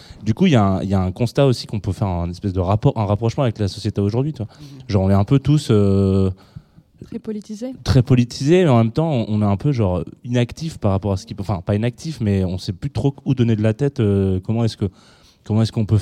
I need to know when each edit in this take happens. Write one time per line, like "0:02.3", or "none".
none